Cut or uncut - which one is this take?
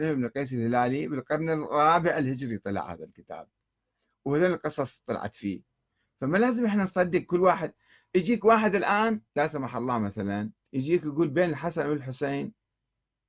cut